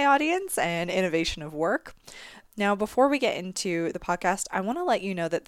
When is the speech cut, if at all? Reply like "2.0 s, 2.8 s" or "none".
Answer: 2.4 s